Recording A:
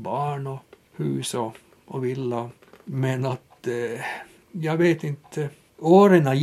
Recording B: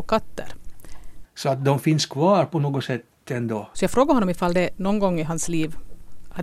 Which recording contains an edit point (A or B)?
B